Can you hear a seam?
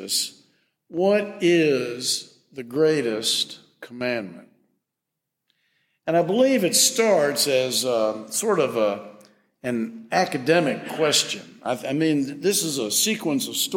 no; 0 cuts

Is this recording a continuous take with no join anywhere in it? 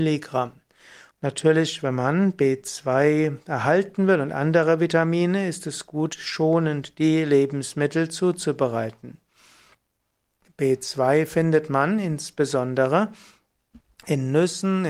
no; 1 cut; at 1.1 s

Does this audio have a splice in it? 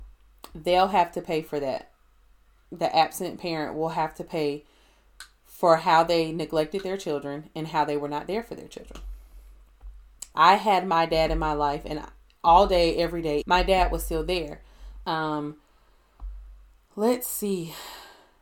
yes; 3 cuts; at 10.3 s, 13.4 s, 15.0 s

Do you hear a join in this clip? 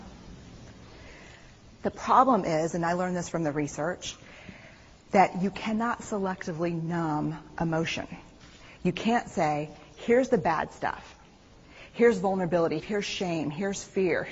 yes; 1 cut; at 12.8 s

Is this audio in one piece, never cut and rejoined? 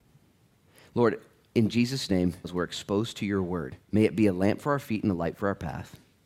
no; 2 cuts; at 2.4 s, 3.8 s

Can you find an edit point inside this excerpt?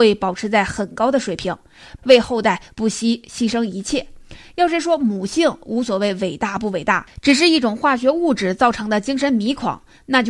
yes; 1 cut; at 2.0 s

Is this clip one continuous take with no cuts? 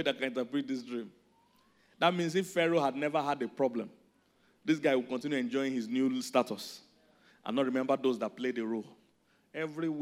yes; 0 cuts

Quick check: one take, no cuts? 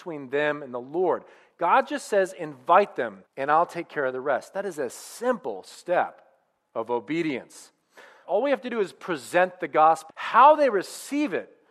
no; 3 cuts; at 3.3 s, 8.2 s, 10.1 s

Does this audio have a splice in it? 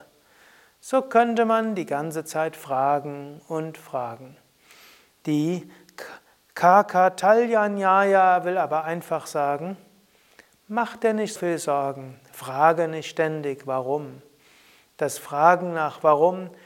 yes; 1 cut; at 11.4 s

